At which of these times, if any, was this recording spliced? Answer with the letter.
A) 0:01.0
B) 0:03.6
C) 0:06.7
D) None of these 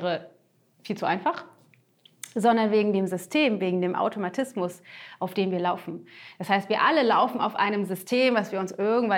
D